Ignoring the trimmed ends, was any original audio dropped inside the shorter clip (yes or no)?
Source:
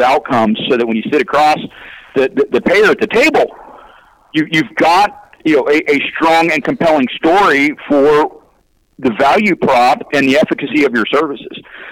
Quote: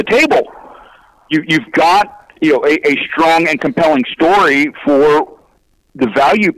no